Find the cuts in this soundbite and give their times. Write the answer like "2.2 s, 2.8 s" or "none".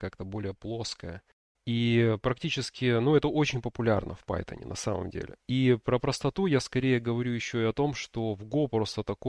1.5 s, 5.4 s